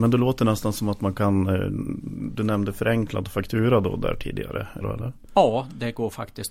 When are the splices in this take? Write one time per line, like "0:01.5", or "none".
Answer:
0:04.8

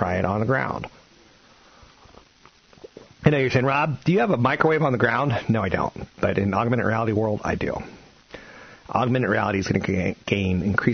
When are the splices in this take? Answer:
none

